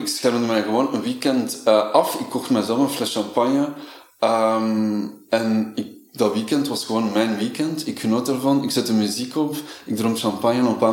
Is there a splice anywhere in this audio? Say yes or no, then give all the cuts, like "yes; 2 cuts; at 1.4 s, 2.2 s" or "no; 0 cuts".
no; 0 cuts